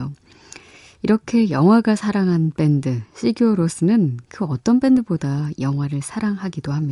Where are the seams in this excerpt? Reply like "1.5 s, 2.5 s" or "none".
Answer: none